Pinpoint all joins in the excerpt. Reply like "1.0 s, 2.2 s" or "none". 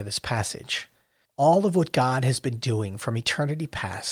1.2 s

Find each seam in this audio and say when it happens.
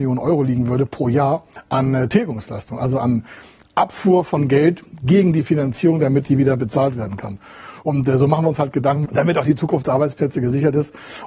7.8 s, 9.1 s

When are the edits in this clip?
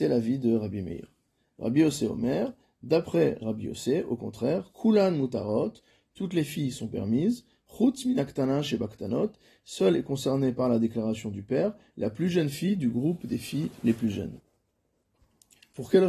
none

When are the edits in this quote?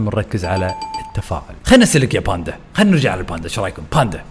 1.6 s

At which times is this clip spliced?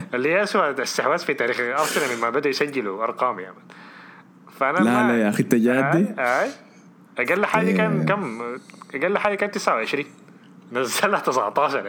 none

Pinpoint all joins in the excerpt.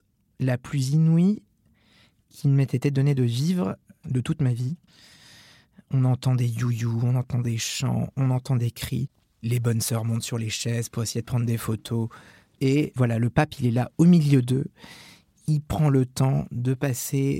none

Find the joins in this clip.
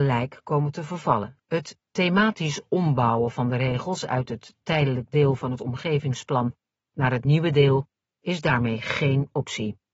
1.4 s

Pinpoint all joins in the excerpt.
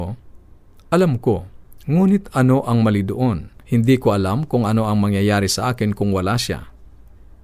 3.6 s

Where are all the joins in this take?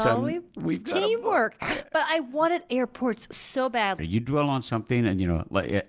4.0 s

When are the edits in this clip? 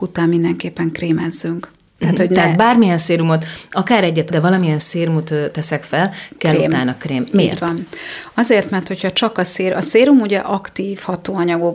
4.3 s

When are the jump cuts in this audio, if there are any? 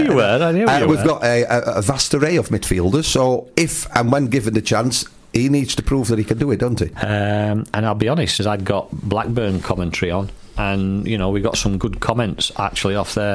6.9 s, 8.4 s

